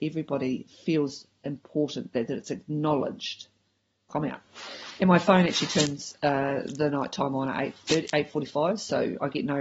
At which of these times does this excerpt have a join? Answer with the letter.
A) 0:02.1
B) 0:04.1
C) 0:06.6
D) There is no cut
B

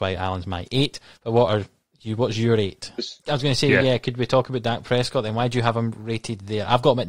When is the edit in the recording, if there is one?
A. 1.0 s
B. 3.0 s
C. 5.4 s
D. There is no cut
B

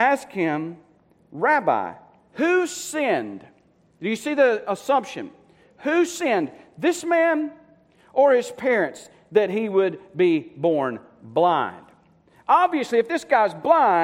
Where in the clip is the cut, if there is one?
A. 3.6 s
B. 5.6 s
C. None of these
C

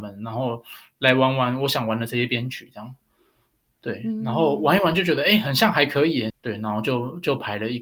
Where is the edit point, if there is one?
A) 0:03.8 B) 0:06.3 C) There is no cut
B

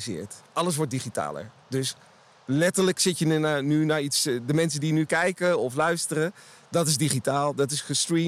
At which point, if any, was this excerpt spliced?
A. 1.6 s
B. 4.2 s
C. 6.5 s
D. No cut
D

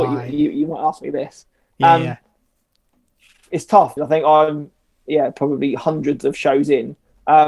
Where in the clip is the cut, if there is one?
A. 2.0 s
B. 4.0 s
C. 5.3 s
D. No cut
B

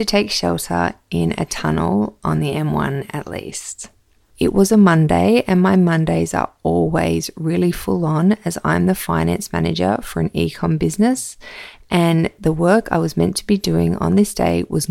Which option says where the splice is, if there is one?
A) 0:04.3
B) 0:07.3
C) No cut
A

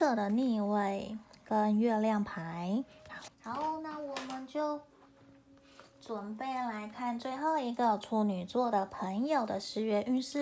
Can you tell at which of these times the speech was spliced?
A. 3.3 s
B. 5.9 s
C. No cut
A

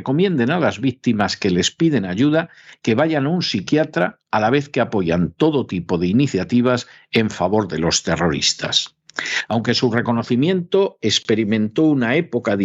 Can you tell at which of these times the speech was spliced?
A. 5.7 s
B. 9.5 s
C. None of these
B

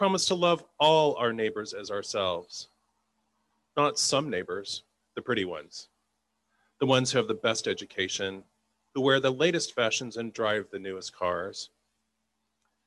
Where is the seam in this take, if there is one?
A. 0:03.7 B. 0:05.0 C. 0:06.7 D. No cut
B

